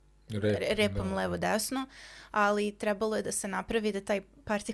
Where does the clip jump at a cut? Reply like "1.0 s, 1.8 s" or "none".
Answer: none